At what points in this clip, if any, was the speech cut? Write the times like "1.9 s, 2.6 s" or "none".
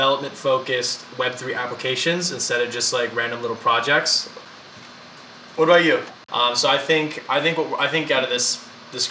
6.3 s